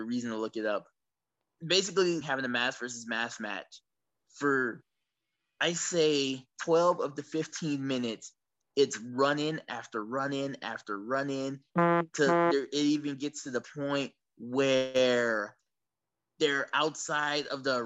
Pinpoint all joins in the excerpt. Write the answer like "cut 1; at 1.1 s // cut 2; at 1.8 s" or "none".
cut 1; at 2.2 s